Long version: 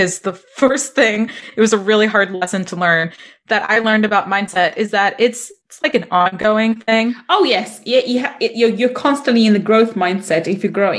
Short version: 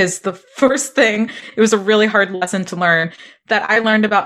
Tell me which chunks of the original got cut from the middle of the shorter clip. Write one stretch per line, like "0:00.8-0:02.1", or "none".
none